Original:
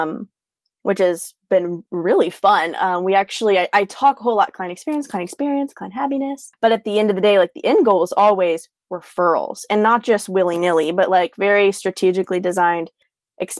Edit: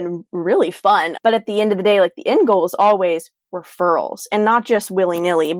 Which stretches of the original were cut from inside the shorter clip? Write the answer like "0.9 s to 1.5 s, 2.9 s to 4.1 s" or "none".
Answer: 2.8 s to 6.5 s